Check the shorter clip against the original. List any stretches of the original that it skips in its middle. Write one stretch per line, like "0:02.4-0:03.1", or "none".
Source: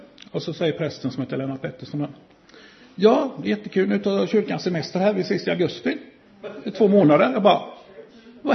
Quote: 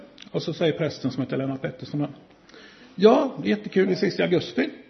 0:03.9-0:05.1